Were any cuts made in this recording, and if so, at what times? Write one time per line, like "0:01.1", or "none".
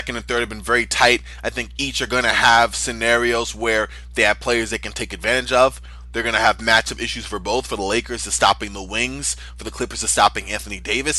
none